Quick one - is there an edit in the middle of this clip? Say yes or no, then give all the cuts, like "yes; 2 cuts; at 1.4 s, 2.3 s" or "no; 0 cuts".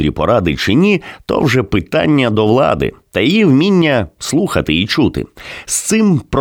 no; 0 cuts